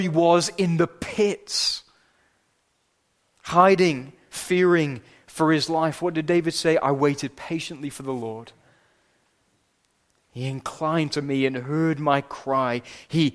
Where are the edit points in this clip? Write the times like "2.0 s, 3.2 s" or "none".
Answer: none